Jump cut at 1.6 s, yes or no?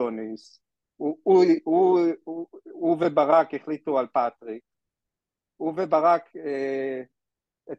no